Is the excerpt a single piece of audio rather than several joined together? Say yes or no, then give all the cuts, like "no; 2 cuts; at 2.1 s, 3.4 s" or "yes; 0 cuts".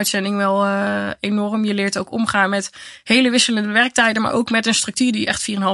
yes; 0 cuts